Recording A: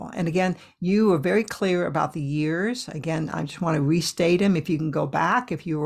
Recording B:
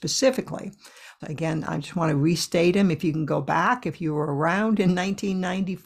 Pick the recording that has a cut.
B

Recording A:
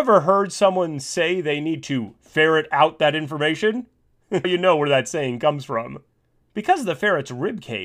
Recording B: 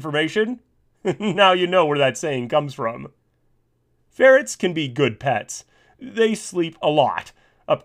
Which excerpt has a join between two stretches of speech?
A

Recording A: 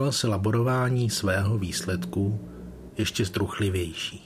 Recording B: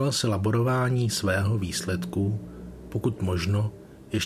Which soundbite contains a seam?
A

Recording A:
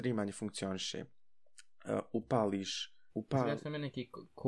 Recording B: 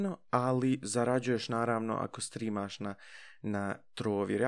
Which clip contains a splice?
A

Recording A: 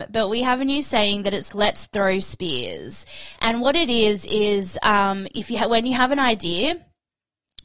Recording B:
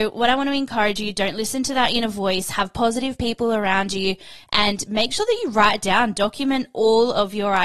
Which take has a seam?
A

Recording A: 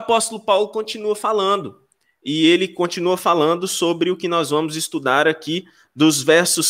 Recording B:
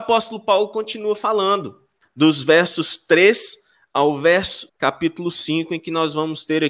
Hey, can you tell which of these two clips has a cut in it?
B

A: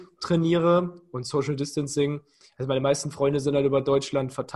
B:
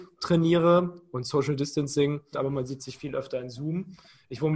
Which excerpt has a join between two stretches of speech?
B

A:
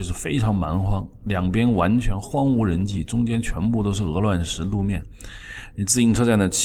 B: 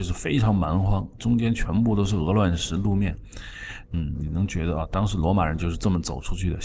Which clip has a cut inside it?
B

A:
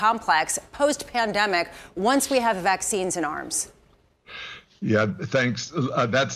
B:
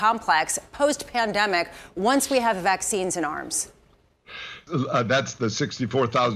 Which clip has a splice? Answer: B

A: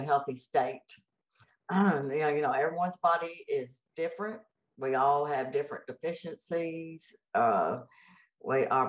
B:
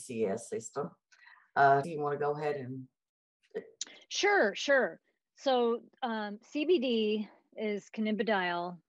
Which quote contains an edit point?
B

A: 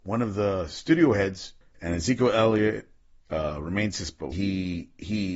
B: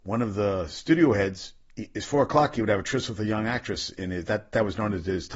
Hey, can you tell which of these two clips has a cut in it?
A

